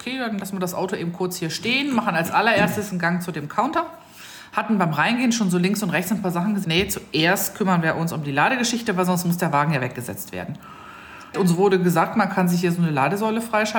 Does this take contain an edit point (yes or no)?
yes